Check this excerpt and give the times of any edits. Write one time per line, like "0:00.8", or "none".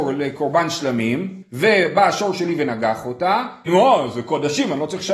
0:01.4
0:03.7